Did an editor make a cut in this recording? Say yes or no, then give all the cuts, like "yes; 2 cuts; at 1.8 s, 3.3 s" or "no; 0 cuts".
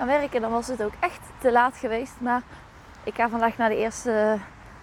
no; 0 cuts